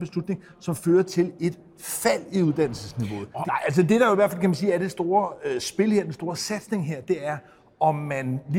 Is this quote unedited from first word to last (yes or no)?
no